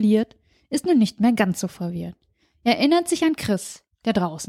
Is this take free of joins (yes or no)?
yes